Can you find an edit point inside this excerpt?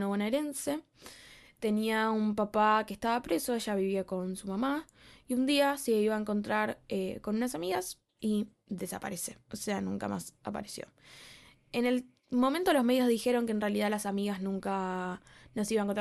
no; 0 cuts

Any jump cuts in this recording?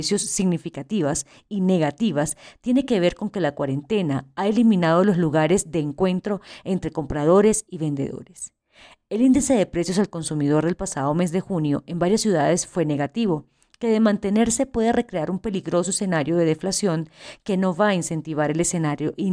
no; 0 cuts

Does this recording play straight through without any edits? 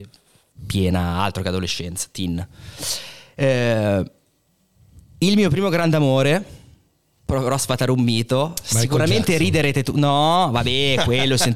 yes; 0 cuts

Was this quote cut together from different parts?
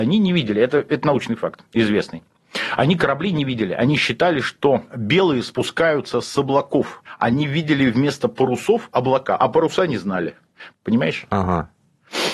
yes; 2 cuts; at 9.4 s, 10.7 s

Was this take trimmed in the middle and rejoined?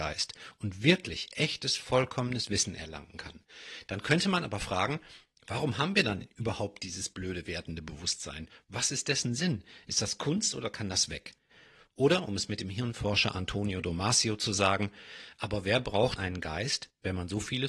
yes; 1 cut; at 16.2 s

